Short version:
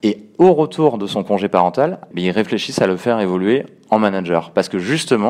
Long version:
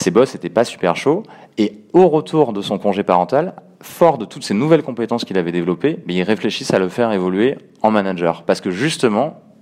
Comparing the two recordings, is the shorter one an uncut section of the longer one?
no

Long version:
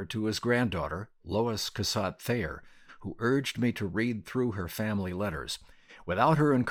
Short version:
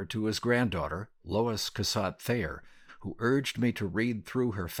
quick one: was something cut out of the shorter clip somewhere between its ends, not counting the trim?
no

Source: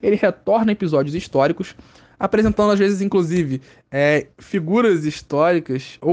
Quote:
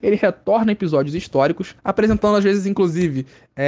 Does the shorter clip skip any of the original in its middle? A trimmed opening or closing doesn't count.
yes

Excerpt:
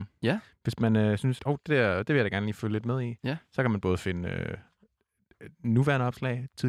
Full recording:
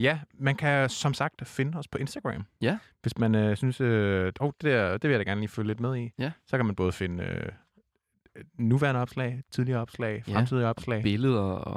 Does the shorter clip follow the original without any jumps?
no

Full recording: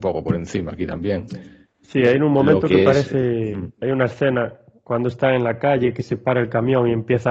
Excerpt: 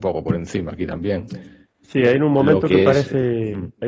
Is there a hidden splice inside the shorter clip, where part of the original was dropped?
no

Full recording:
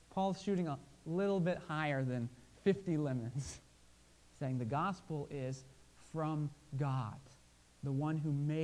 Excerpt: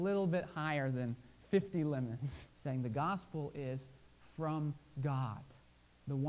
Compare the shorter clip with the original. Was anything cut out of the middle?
yes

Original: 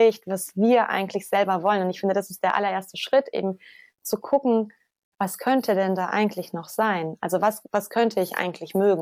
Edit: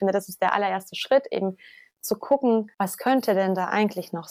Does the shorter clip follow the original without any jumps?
no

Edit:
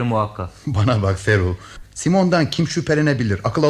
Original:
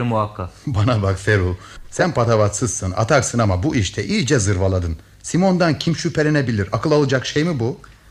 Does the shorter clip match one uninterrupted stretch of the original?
no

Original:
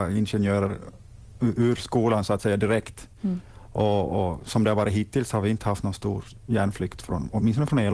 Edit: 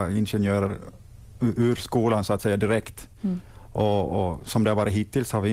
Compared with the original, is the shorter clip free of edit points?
yes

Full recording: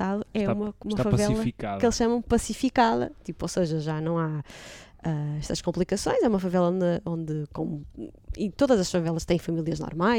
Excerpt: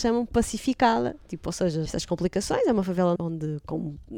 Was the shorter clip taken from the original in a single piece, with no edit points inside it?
no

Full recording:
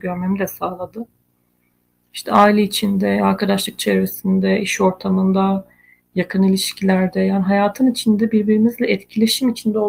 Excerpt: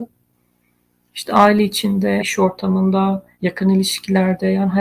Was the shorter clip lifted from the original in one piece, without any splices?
no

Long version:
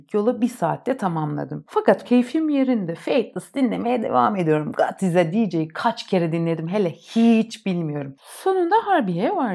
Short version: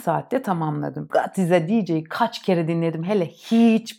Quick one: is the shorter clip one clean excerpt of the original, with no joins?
no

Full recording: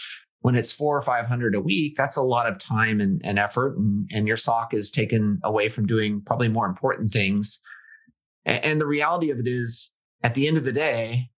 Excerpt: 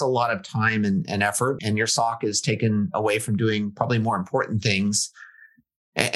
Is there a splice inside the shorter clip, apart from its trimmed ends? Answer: yes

